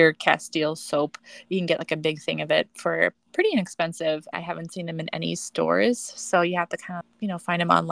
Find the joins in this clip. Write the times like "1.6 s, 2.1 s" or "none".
4.3 s, 7.0 s